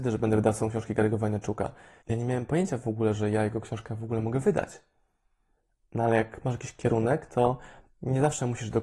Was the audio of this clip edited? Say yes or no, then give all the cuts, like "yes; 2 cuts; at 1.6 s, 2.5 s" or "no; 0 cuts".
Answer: yes; 1 cut; at 2.0 s